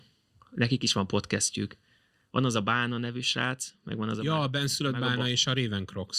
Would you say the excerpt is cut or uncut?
uncut